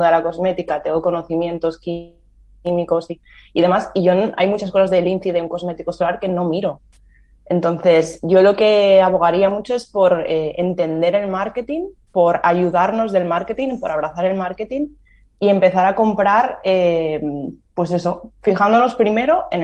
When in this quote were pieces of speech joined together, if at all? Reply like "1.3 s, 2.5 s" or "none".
none